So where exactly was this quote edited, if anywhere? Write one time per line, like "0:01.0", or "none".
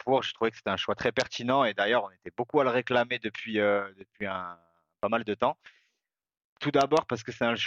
none